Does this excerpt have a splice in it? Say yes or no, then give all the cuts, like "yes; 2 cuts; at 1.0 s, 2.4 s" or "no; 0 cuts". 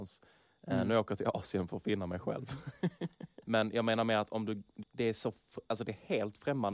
yes; 2 cuts; at 3.4 s, 4.8 s